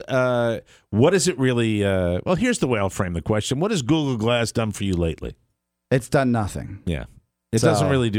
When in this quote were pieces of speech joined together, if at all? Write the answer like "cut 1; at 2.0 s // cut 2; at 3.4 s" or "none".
none